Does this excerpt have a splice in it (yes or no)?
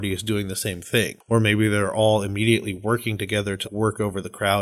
yes